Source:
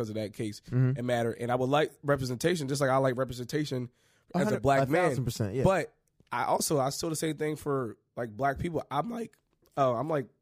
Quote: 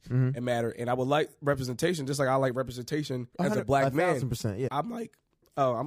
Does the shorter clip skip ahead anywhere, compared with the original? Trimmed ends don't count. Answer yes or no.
yes